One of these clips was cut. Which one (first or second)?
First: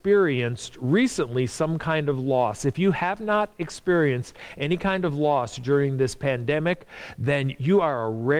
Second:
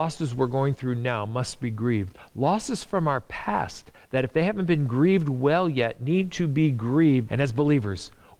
second